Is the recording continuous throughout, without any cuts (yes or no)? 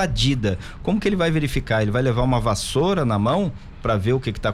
yes